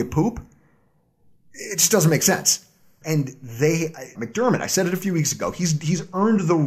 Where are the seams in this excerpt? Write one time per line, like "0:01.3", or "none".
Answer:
0:03.0
0:04.2